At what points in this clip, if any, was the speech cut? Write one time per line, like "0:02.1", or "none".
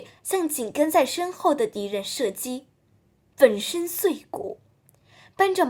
0:03.3